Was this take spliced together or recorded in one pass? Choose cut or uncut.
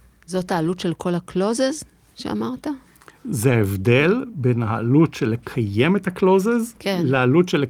uncut